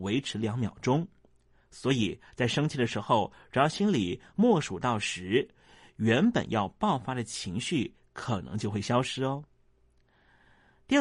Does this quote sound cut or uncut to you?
uncut